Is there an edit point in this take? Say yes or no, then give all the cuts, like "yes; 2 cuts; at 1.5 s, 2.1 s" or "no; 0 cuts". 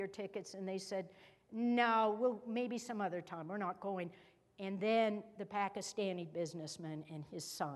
no; 0 cuts